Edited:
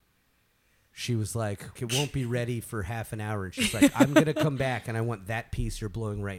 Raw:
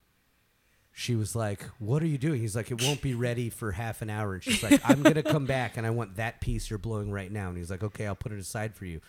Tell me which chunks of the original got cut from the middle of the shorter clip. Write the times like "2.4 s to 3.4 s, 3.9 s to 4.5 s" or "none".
1.8 s to 2.6 s